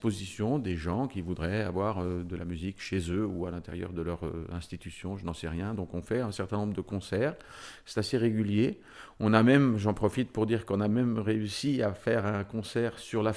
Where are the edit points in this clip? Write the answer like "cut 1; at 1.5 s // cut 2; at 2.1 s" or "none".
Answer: none